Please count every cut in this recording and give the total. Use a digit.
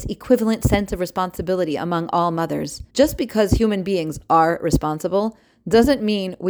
1